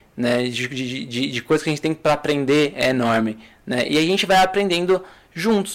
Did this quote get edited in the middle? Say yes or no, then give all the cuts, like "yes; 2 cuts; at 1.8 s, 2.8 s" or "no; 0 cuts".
no; 0 cuts